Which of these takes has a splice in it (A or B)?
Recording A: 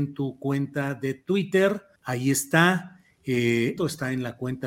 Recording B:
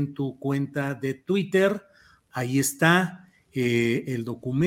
A